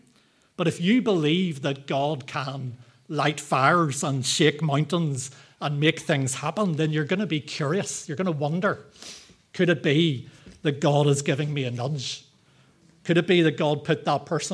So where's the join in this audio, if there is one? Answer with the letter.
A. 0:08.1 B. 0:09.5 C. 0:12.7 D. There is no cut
D